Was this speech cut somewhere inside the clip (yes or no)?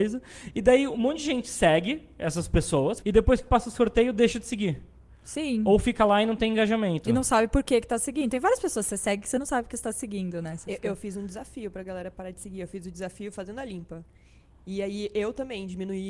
yes